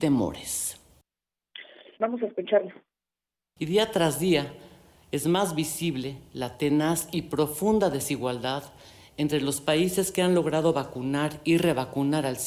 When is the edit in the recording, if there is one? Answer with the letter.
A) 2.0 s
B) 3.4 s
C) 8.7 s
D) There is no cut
A